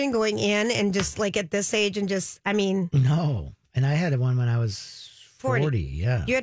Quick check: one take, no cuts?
yes; 0 cuts

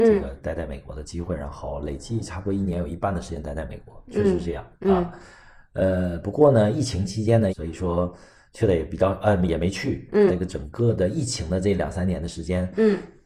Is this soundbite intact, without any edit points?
no; 2 cuts; at 7.5 s, 10.3 s

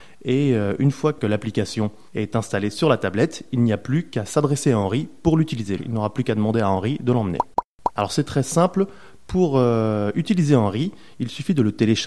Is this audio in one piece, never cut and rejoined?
no; 1 cut; at 5.8 s

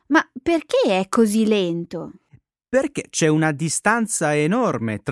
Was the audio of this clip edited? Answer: no; 0 cuts

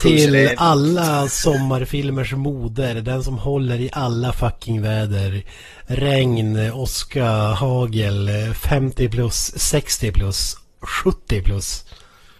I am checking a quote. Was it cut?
no; 0 cuts

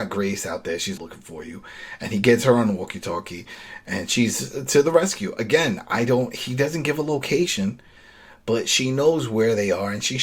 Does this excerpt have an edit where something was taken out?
yes; 1 cut; at 1.0 s

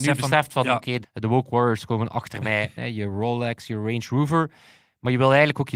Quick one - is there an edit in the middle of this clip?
yes; 2 cuts; at 1.0 s, 2.8 s

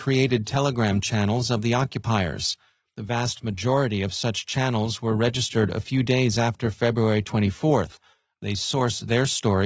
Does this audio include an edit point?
yes; 2 cuts; at 2.9 s, 8.2 s

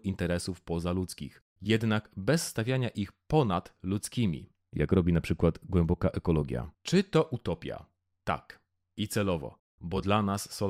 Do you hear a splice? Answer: yes; 1 cut; at 6.8 s

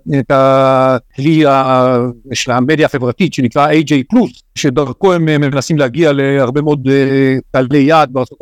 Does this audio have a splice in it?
yes; 1 cut; at 4.6 s

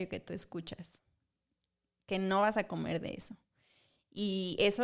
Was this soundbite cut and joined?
no; 0 cuts

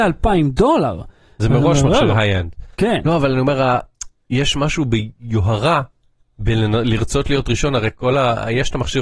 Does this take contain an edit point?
no; 0 cuts

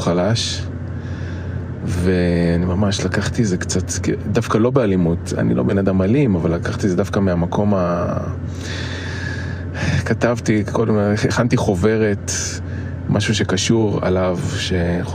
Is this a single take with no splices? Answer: yes; 0 cuts

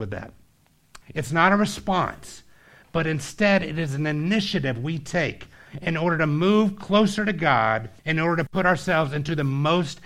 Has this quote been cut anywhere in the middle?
yes; 2 cuts; at 1.0 s, 8.0 s

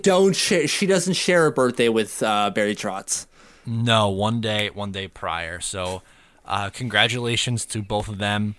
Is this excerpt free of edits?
yes; 0 cuts

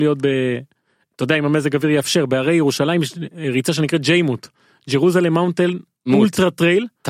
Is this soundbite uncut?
yes; 0 cuts

